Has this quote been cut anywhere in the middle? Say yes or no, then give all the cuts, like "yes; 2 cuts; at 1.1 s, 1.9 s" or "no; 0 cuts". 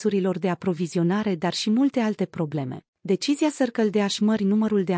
yes; 1 cut; at 2.9 s